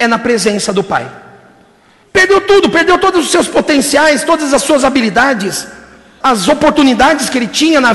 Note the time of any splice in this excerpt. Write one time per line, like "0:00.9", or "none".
0:02.0
0:06.2